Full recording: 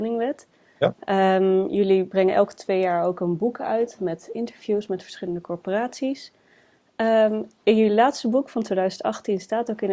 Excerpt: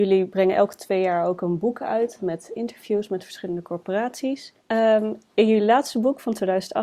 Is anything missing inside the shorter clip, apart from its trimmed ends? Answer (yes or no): yes